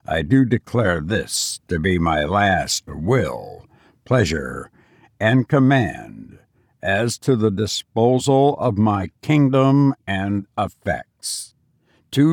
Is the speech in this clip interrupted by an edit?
no; 0 cuts

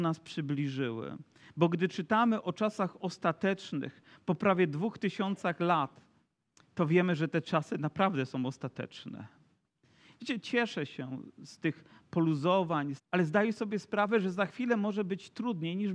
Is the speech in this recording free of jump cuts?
no; 2 cuts; at 10.1 s, 13.0 s

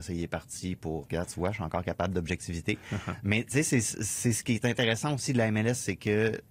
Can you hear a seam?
yes; 1 cut; at 1.0 s

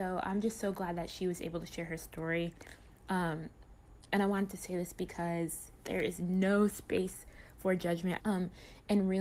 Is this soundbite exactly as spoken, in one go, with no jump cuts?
no; 1 cut; at 8.2 s

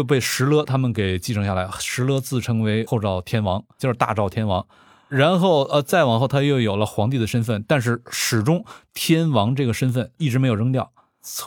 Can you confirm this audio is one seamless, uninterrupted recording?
no; 1 cut; at 3.8 s

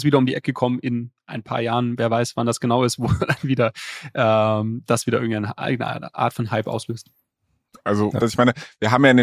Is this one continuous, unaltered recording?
no; 1 cut; at 8.2 s

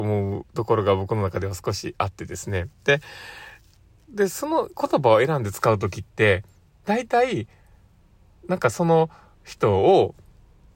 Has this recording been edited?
no; 0 cuts

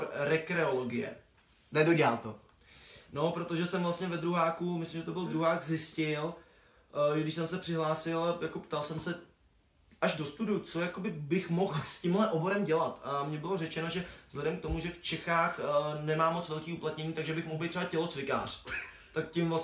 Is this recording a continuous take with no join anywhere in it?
yes; 0 cuts

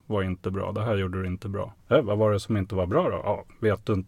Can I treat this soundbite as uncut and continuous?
no; 1 cut; at 1.8 s

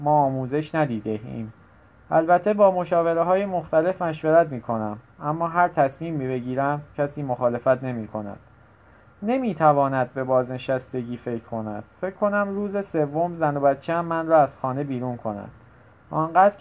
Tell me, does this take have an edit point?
no; 0 cuts

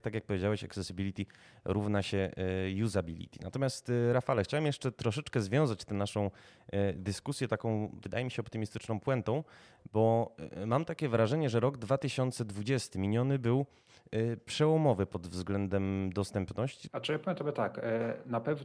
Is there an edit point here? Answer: yes; 1 cut; at 16.9 s

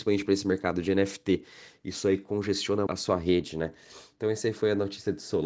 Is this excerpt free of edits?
no; 2 cuts; at 1.8 s, 2.9 s

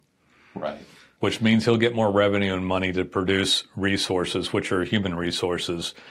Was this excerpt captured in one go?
no; 1 cut; at 1.2 s

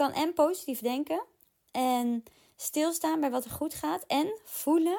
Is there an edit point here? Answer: no; 0 cuts

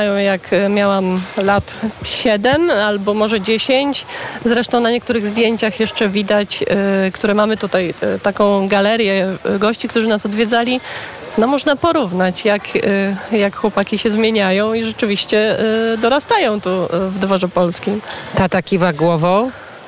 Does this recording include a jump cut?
no; 0 cuts

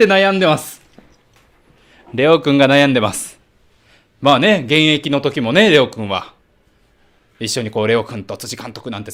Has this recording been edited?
no; 0 cuts

